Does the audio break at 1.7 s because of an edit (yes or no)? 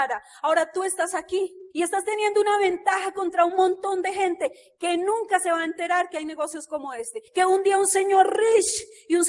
yes